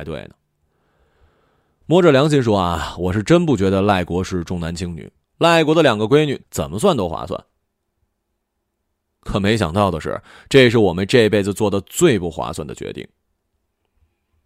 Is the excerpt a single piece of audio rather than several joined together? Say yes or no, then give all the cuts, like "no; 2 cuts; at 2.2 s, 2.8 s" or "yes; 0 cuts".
no; 2 cuts; at 5.2 s, 6.4 s